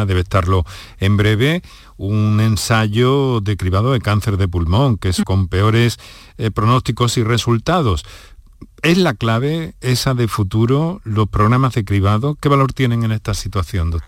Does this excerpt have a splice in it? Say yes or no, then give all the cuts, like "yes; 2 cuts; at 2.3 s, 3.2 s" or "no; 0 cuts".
yes; 1 cut; at 5.2 s